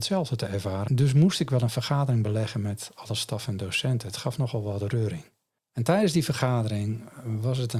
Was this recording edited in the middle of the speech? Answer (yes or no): no